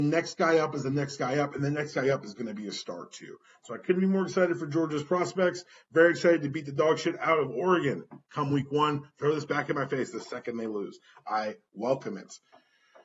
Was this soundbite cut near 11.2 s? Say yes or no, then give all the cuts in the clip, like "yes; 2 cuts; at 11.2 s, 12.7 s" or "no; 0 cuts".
no; 0 cuts